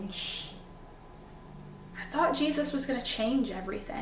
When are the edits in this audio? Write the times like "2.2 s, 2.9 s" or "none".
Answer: 1.9 s